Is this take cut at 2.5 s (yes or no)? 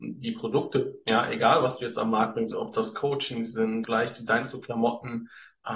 yes